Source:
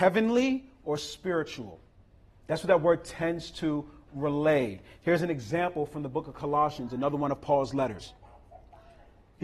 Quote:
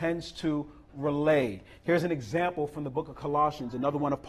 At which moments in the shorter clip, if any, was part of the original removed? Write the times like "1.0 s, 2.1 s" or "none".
none